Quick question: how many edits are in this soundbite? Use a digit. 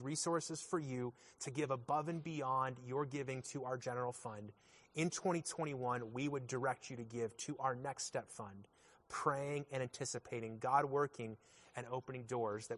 0